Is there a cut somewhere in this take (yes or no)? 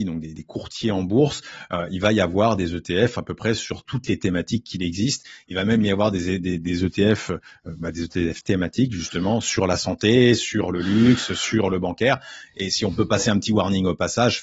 no